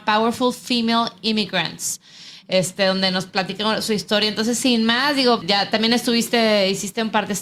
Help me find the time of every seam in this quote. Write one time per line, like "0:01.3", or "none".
0:05.4